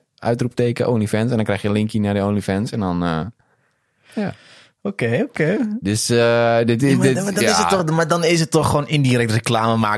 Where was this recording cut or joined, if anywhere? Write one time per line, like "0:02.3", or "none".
none

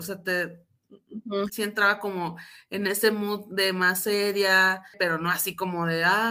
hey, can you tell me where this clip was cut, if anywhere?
0:01.5
0:04.9

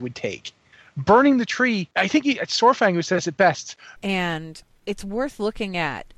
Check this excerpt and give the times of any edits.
0:01.9
0:04.0

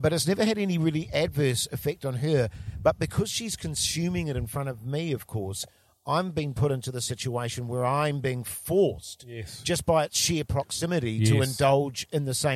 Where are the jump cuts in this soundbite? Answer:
none

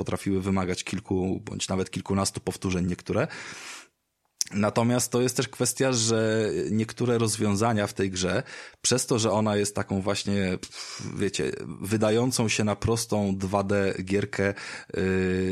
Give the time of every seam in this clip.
none

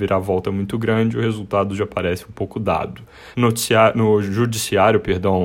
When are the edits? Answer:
0:03.3

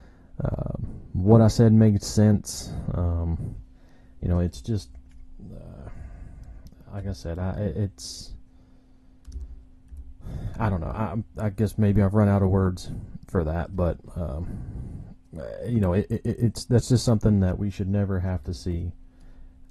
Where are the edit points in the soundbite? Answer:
none

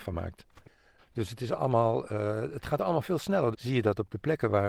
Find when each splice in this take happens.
0:01.0
0:03.5

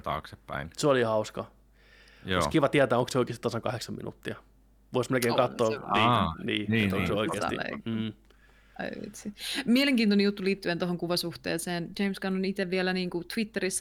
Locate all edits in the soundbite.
none

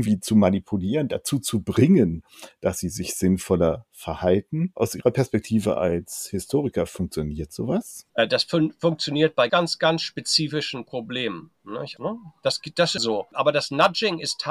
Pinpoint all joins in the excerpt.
0:09.5
0:12.0
0:13.0

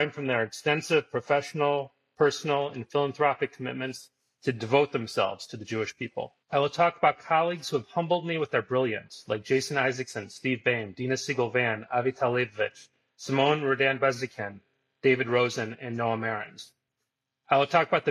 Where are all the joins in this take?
0:06.4

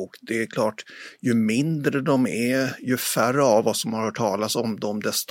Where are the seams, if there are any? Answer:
none

